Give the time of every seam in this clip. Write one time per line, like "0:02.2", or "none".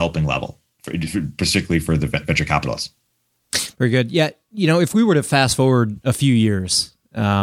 none